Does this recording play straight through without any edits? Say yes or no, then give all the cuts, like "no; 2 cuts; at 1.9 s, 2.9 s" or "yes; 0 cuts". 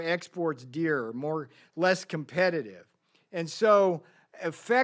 yes; 0 cuts